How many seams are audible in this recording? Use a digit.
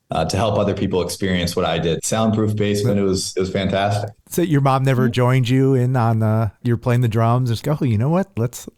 3